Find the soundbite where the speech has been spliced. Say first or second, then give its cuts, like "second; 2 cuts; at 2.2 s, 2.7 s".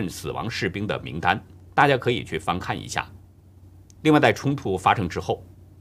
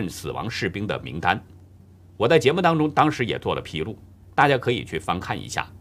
first; 2 cuts; at 1.7 s, 4.0 s